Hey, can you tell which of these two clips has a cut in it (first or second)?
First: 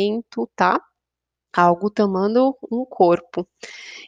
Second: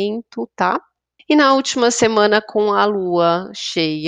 second